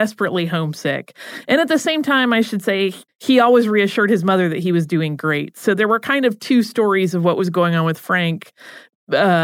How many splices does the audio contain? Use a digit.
1